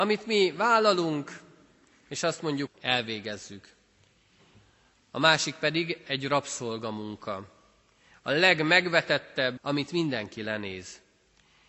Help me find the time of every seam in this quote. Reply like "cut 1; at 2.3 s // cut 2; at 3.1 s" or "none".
cut 1; at 2.7 s // cut 2; at 9.6 s

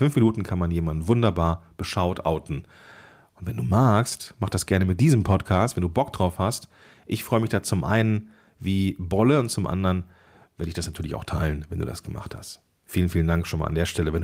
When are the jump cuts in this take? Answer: none

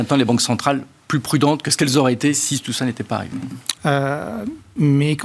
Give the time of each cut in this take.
cut 1; at 3.8 s

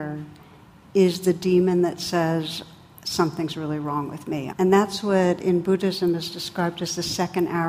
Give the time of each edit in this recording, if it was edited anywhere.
cut 1; at 4.5 s

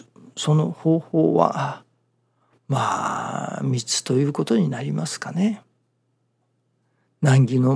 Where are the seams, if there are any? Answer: none

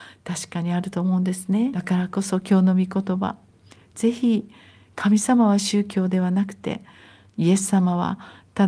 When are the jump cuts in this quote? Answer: cut 1; at 1.7 s

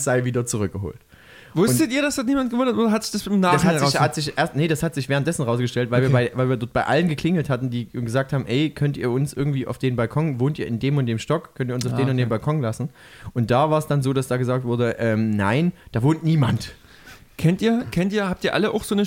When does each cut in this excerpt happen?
none

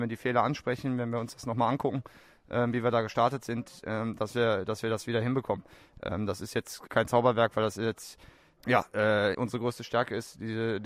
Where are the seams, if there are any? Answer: cut 1; at 6.9 s // cut 2; at 9.3 s

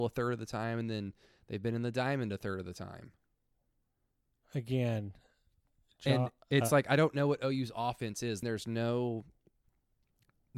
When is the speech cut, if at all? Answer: cut 1; at 8.4 s

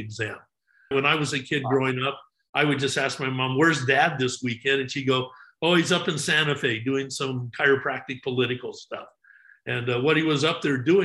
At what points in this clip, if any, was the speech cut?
cut 1; at 0.9 s

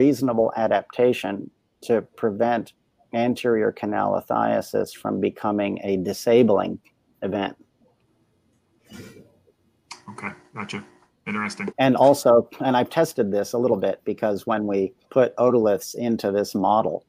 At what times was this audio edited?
cut 1; at 11.7 s // cut 2; at 15.0 s

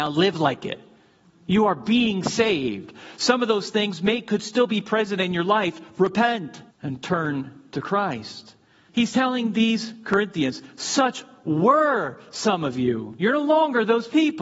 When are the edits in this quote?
cut 1; at 6.7 s // cut 2; at 8.9 s

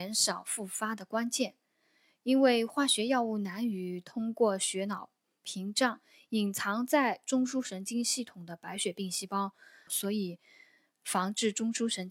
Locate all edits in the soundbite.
cut 1; at 9.9 s

